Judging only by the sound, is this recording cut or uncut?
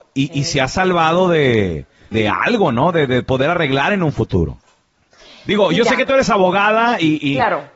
cut